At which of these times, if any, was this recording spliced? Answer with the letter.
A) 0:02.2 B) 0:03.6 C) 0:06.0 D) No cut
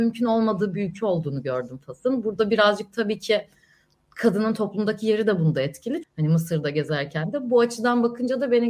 C